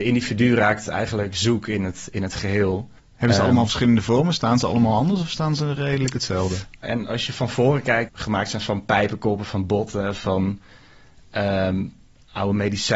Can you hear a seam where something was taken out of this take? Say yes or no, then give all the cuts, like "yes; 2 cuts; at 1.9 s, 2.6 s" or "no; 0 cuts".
yes; 3 cuts; at 3.0 s, 6.8 s, 8.1 s